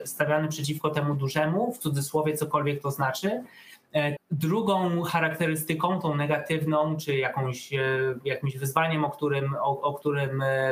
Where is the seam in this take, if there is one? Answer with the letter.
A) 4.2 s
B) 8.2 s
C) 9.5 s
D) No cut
A